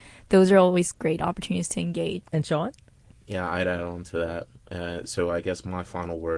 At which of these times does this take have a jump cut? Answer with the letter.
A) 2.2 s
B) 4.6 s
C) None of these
A